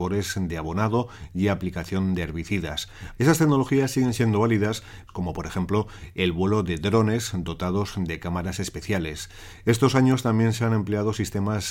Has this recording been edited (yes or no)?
yes